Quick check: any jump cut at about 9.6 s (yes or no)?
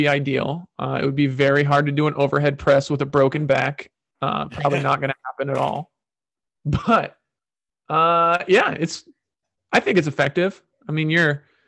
no